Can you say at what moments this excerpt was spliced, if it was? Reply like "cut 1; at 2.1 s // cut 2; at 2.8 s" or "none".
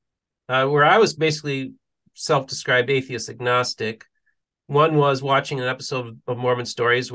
none